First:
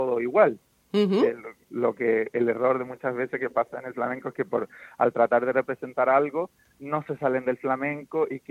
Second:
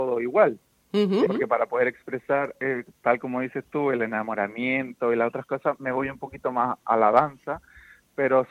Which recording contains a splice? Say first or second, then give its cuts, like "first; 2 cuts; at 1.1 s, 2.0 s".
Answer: second; 1 cut; at 1.3 s